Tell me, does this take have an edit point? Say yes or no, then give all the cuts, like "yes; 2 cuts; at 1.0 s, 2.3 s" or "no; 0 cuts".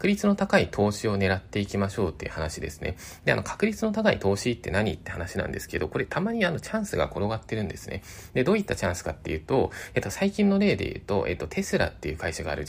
no; 0 cuts